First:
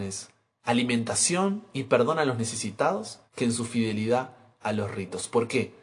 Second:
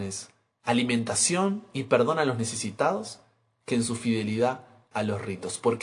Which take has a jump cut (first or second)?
first